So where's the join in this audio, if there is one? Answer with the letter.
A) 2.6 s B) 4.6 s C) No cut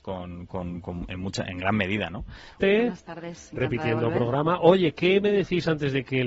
A